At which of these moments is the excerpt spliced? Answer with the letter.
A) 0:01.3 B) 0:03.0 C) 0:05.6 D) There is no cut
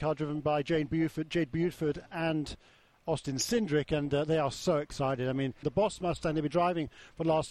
C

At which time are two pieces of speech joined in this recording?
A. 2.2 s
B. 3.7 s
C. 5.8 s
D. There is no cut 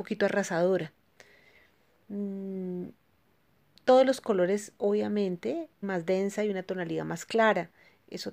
C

